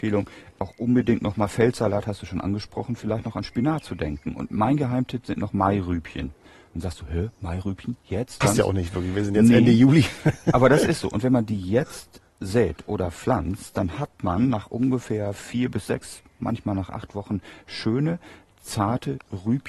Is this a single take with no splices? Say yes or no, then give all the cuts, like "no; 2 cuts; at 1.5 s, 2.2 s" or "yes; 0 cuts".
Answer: no; 1 cut; at 8.4 s